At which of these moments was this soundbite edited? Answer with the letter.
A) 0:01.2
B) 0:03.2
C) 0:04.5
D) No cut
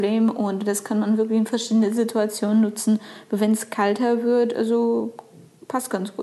D